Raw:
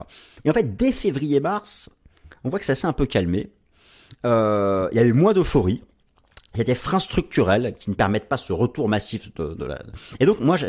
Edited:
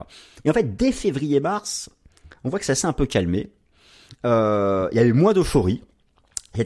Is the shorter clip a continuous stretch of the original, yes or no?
yes